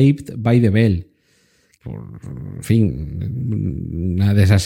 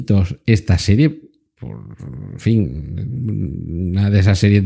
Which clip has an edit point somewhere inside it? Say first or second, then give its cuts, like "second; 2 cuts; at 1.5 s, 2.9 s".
first; 1 cut; at 1.8 s